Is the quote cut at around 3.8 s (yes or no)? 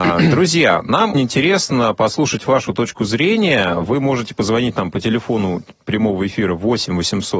no